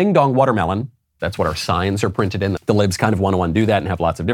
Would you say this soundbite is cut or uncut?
cut